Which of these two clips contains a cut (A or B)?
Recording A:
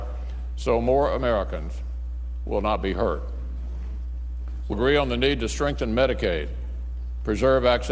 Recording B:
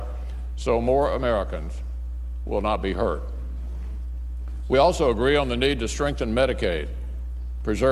A